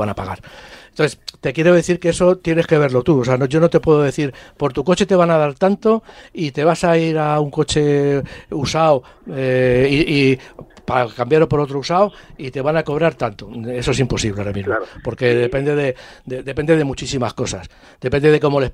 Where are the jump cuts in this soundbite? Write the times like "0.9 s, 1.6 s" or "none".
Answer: none